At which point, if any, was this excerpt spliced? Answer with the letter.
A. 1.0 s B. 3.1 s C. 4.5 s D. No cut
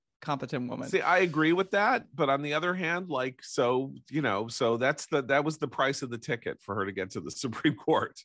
D